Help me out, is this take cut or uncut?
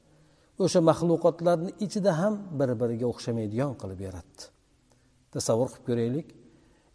uncut